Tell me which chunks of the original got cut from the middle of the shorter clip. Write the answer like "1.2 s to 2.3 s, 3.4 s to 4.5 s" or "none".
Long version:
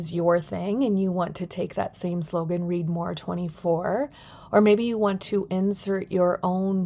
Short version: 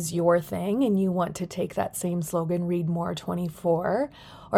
none